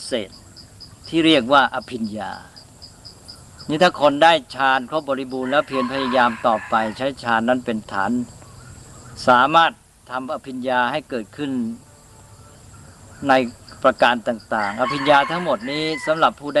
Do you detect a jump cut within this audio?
no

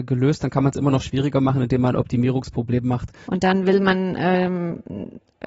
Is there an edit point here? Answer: yes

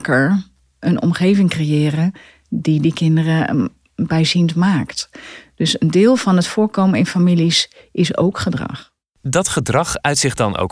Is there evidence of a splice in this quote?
no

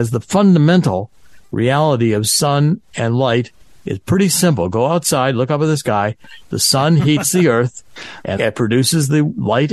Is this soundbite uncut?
no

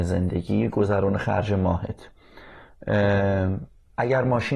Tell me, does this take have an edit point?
no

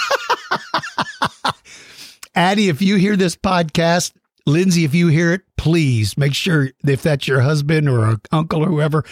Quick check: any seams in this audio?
no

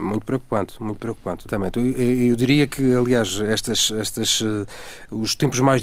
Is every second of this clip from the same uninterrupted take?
no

